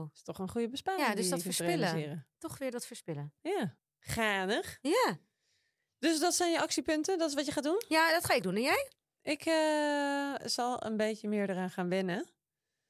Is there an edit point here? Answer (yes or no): no